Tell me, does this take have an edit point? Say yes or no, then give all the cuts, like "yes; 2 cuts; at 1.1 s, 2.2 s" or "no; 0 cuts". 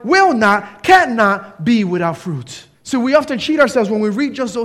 yes; 1 cut; at 2.7 s